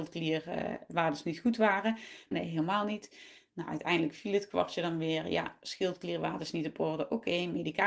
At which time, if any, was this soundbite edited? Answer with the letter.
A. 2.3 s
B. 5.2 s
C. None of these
A